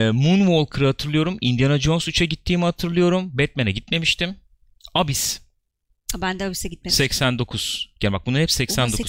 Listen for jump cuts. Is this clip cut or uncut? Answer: uncut